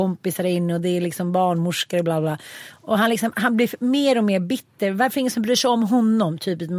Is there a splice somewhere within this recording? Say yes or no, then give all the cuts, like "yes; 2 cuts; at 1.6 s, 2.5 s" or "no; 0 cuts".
no; 0 cuts